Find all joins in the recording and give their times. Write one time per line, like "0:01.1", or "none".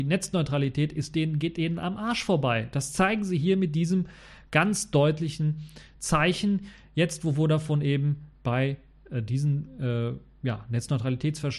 none